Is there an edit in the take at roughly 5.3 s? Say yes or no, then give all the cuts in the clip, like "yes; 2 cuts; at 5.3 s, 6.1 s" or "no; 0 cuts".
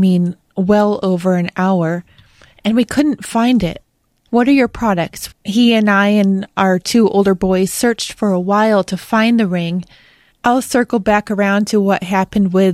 yes; 3 cuts; at 4.3 s, 5.3 s, 10.3 s